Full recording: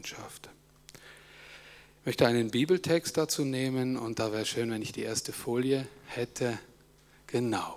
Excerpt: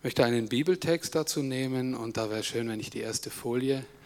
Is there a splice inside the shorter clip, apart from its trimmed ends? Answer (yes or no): no